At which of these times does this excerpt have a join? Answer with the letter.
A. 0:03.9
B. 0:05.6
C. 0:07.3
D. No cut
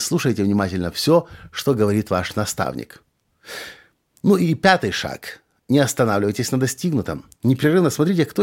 D